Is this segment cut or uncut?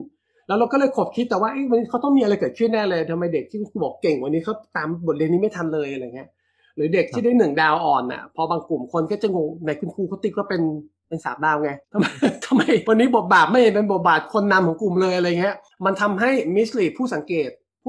cut